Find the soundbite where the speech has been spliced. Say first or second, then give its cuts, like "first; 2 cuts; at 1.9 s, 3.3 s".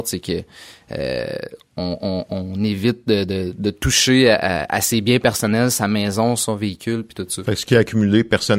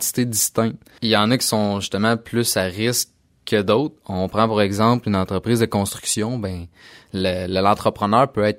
second; 1 cut; at 1.0 s